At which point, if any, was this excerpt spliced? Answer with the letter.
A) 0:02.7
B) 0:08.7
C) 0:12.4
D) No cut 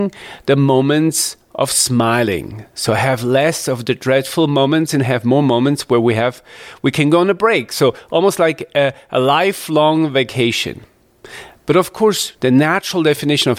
C